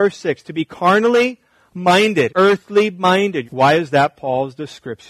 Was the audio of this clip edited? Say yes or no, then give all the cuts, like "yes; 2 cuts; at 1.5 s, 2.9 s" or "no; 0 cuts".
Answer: yes; 2 cuts; at 2.3 s, 3.4 s